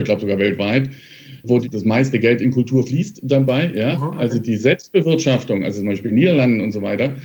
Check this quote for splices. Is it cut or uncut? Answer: uncut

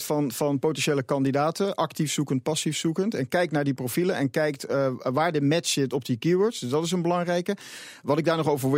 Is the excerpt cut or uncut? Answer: uncut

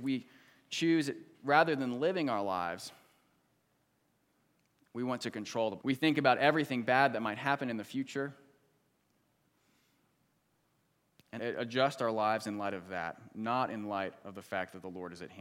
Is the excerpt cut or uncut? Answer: cut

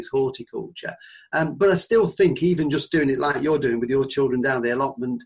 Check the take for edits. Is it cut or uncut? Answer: uncut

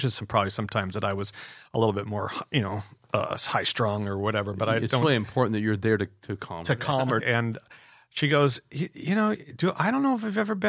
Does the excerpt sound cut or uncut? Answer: cut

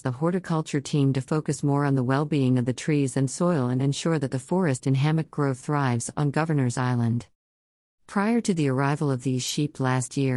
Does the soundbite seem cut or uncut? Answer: uncut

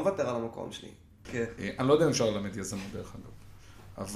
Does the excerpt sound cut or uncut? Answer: cut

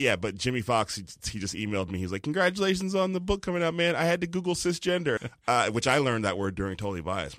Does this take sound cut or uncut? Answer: cut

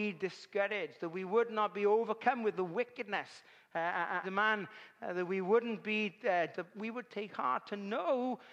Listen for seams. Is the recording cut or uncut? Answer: cut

